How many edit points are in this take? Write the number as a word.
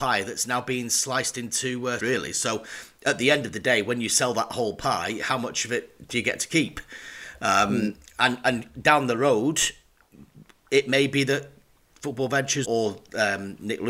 two